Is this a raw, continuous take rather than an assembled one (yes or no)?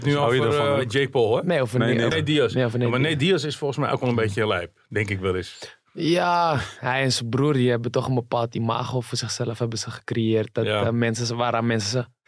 no